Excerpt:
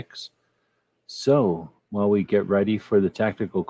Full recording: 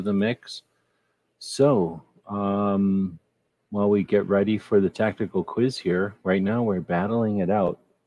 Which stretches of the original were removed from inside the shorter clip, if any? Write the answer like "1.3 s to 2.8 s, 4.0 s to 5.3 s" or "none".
2.1 s to 3.6 s